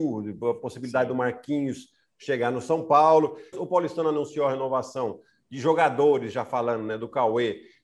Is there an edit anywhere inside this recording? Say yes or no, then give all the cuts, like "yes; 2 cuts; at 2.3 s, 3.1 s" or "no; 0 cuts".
yes; 1 cut; at 3.5 s